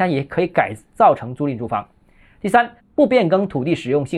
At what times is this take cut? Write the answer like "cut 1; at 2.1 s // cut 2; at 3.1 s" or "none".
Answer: cut 1; at 2.8 s